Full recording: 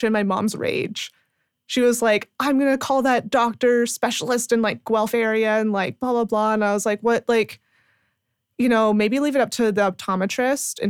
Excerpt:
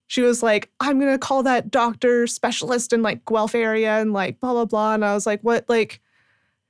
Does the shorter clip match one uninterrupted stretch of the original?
yes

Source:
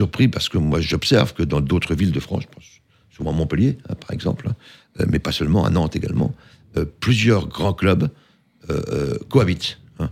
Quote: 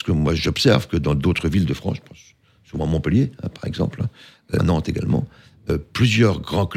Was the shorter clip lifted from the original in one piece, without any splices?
no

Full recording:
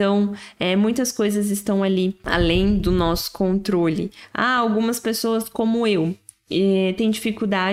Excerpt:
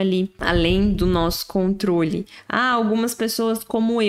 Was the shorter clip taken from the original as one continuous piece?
yes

